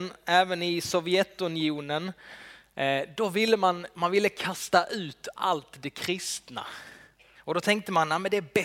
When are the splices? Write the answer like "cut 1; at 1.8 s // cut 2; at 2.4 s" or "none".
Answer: cut 1; at 7.3 s